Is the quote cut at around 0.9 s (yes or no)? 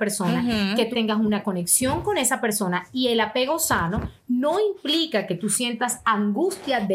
yes